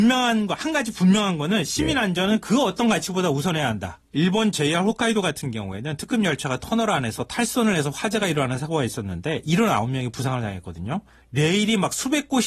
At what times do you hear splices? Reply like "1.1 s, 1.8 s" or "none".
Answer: 4.1 s, 11.2 s